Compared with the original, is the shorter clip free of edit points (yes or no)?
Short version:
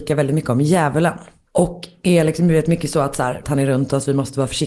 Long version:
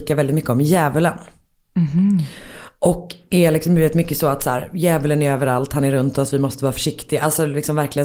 no